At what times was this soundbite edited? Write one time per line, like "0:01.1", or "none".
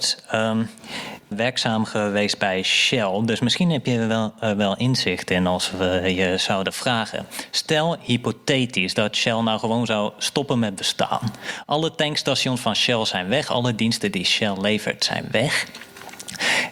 0:01.3